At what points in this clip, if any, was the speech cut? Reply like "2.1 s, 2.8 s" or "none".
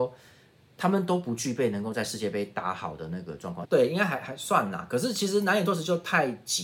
3.6 s